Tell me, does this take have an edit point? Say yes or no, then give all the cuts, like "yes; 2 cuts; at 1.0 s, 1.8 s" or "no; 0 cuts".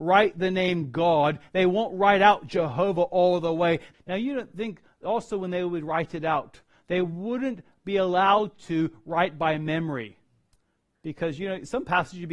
yes; 1 cut; at 3.9 s